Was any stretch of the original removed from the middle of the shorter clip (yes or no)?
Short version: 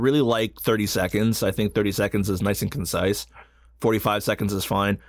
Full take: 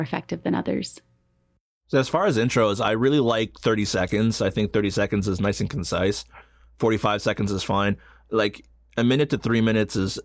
no